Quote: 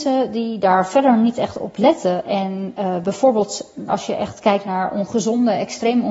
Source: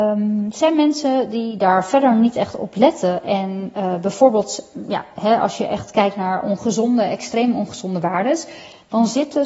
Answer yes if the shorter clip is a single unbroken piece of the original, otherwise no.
no